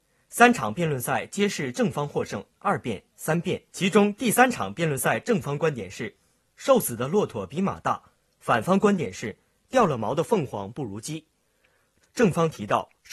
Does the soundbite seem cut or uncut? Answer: cut